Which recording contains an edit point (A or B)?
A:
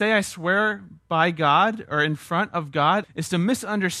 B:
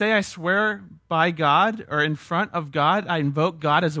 A